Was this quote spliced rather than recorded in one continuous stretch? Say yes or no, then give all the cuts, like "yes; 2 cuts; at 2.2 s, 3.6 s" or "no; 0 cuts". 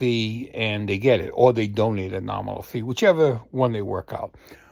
no; 0 cuts